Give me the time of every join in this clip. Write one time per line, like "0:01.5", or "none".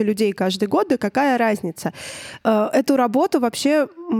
0:02.4